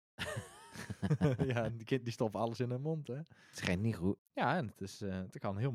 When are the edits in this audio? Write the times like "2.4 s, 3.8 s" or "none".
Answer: 4.2 s